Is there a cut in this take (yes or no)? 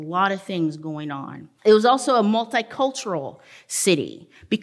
yes